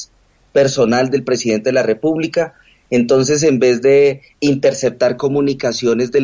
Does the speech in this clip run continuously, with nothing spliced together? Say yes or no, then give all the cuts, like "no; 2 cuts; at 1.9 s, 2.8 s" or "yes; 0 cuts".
yes; 0 cuts